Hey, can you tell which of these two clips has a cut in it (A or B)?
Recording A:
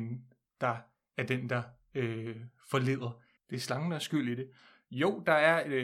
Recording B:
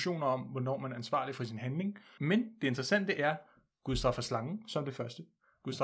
A